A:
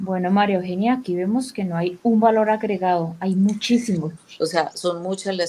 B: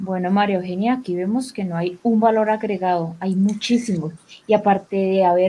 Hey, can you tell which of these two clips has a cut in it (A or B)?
A